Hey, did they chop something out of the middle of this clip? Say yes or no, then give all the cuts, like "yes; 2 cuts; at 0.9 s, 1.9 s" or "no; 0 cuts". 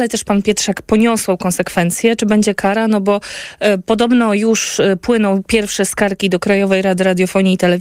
no; 0 cuts